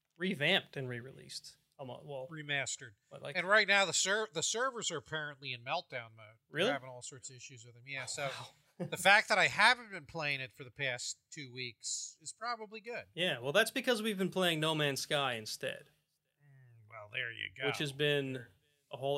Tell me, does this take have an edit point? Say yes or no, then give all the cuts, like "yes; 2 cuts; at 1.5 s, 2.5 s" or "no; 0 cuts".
no; 0 cuts